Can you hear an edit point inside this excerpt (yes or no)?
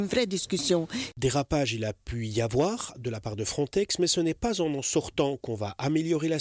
yes